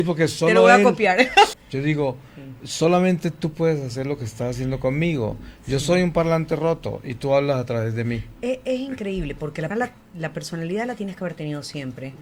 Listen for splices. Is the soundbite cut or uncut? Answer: cut